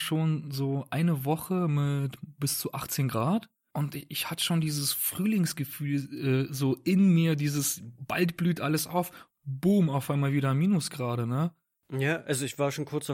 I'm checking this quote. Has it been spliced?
no; 0 cuts

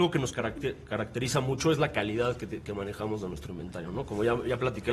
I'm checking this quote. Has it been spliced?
no; 0 cuts

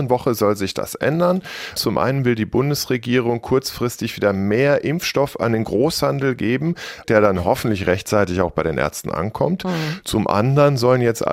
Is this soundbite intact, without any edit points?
no; 2 cuts; at 1.8 s, 7.0 s

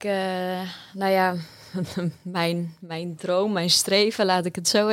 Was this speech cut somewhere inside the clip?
no; 0 cuts

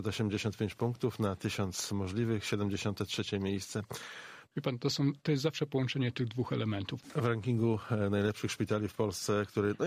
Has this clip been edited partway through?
yes; 2 cuts; at 4.5 s, 7.0 s

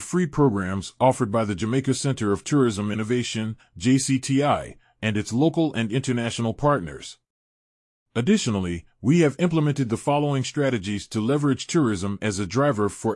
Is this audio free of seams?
yes; 0 cuts

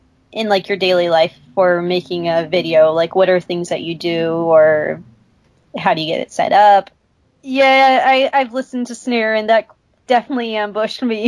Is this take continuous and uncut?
no; 1 cut; at 7.2 s

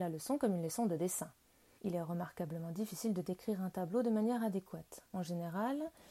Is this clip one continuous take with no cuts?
no; 1 cut; at 1.8 s

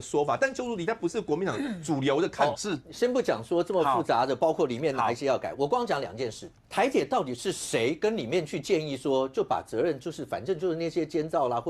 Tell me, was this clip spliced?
yes; 2 cuts; at 2.5 s, 6.5 s

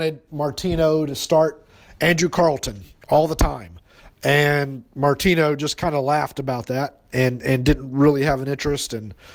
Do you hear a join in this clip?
no; 0 cuts

